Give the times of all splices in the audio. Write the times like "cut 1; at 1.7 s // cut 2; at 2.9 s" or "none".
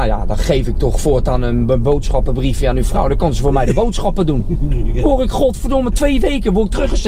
cut 1; at 5.9 s